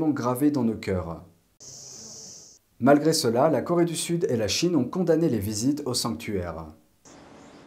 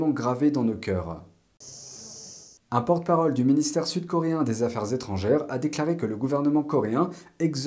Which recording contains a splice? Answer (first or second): second